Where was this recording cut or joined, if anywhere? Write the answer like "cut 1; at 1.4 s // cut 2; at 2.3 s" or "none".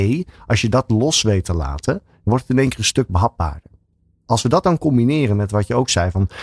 none